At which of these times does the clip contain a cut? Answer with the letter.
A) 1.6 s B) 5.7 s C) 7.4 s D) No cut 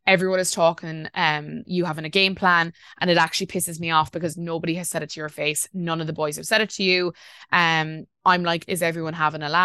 A